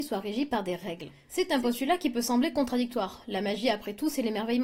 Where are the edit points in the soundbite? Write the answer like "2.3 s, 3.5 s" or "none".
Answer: none